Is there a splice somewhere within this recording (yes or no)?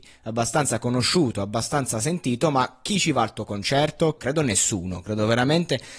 yes